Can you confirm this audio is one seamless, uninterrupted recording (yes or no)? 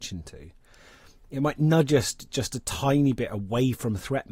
yes